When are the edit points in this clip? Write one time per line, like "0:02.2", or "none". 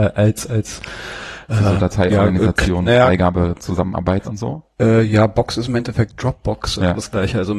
none